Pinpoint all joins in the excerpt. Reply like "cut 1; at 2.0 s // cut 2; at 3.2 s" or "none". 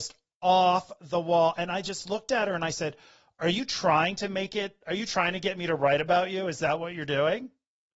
none